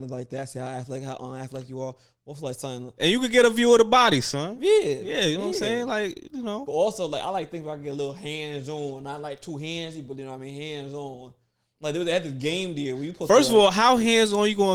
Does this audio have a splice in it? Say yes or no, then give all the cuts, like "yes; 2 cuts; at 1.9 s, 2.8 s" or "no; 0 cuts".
no; 0 cuts